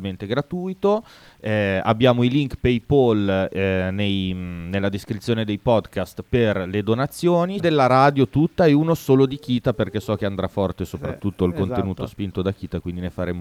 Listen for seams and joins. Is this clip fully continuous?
no; 1 cut; at 7.6 s

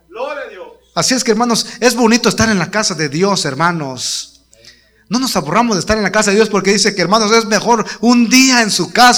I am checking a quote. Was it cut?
no; 0 cuts

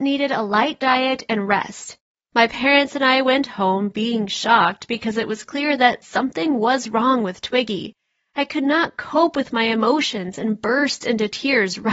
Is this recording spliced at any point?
yes; 1 cut; at 2.1 s

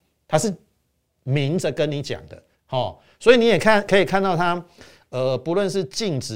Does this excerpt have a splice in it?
yes; 1 cut; at 2.5 s

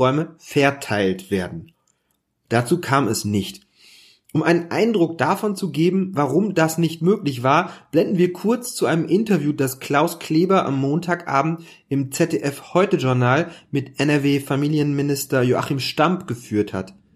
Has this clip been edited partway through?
no; 0 cuts

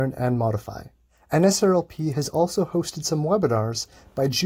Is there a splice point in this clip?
no; 0 cuts

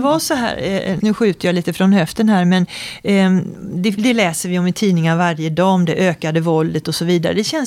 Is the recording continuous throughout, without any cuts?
no; 2 cuts; at 1.0 s, 4.0 s

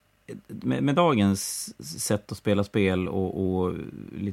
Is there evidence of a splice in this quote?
no; 0 cuts

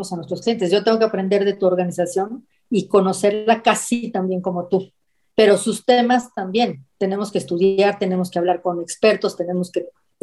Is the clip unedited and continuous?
yes; 0 cuts

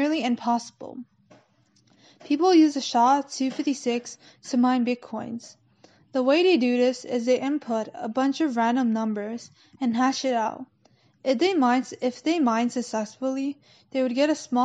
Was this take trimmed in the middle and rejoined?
no; 0 cuts

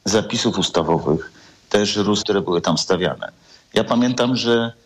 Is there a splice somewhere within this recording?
yes; 1 cut; at 2.2 s

